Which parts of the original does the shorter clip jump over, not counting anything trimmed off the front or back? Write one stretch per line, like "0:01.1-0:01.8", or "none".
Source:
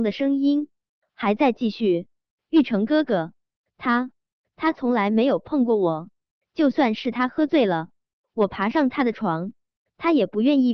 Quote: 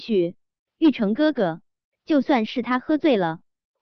0:03.6-0:06.4